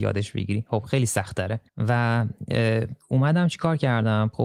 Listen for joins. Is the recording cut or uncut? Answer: cut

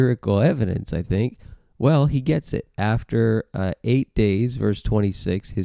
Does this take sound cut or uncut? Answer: uncut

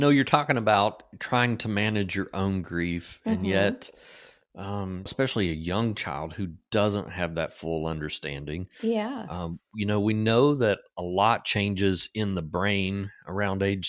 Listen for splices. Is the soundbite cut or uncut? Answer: cut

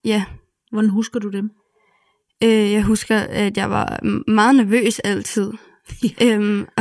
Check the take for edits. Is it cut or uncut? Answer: uncut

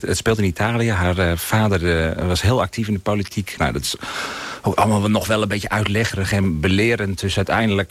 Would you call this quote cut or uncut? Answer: cut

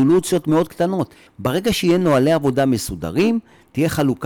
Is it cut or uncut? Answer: cut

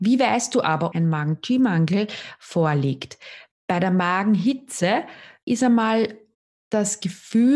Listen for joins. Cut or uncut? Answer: cut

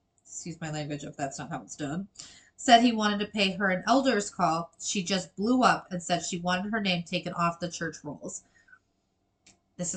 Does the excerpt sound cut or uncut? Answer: uncut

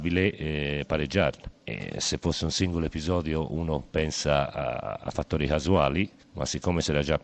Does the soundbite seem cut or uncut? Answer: uncut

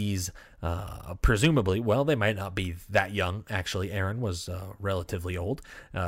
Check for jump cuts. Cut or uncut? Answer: uncut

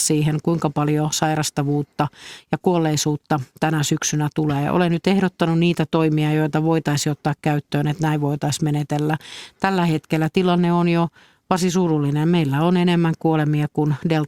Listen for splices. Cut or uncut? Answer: uncut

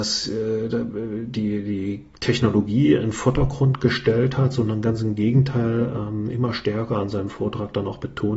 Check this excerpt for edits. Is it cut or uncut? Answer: uncut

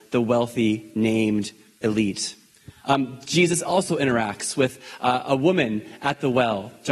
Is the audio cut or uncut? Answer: uncut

